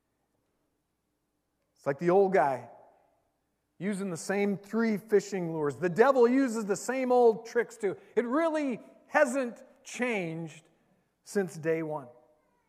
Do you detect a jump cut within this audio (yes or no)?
no